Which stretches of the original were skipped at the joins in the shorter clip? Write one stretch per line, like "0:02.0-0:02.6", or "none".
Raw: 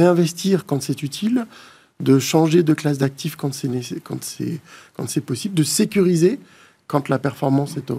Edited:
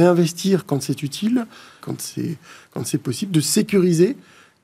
0:01.8-0:04.0